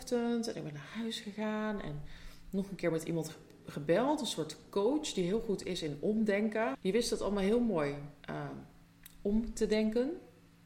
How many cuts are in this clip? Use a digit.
2